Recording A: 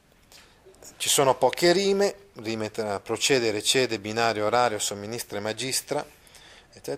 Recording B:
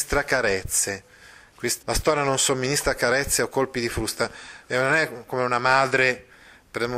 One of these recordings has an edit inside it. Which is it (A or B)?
B